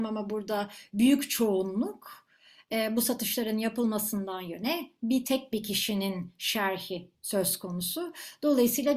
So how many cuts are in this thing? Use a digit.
1